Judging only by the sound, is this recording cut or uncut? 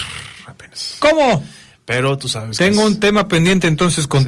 uncut